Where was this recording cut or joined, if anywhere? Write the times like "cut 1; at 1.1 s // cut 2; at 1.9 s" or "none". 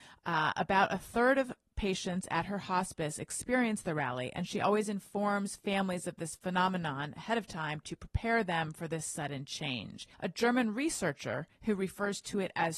cut 1; at 10.1 s